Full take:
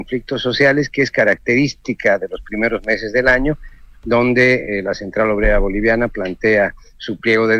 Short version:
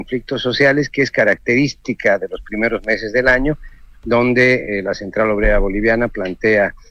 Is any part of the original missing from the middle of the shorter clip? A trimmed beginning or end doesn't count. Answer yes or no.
no